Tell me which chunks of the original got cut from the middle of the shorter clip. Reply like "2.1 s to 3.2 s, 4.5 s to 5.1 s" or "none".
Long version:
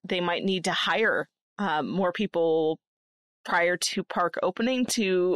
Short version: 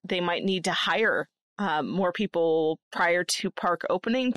2.8 s to 3.4 s